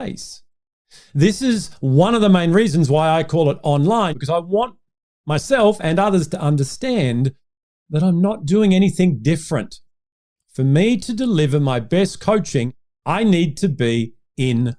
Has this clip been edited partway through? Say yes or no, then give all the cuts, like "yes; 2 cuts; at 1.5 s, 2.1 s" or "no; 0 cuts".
yes; 2 cuts; at 4.1 s, 10.4 s